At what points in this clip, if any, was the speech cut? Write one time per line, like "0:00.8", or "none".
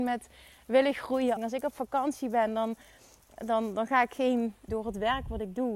0:01.4
0:04.7